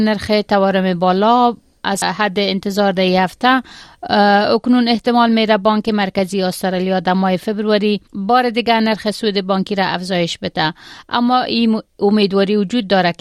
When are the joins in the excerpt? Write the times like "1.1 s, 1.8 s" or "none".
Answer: 8.0 s